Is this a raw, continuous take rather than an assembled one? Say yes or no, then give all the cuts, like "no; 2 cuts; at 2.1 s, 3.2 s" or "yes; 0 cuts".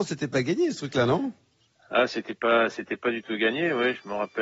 yes; 0 cuts